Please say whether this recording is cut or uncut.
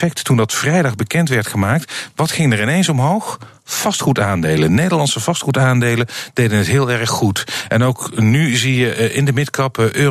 uncut